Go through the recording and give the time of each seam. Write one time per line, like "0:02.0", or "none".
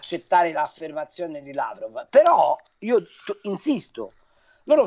none